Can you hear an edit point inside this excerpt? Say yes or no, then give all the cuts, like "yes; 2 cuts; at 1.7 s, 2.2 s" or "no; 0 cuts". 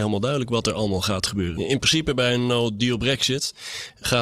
no; 0 cuts